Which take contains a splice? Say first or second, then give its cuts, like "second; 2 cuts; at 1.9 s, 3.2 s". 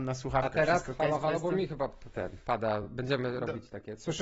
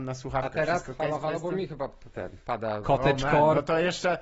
second; 1 cut; at 2.8 s